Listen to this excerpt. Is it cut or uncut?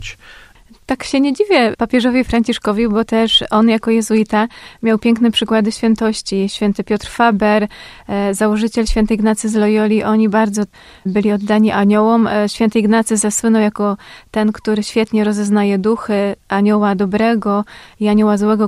uncut